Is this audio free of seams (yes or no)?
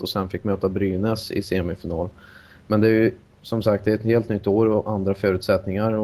yes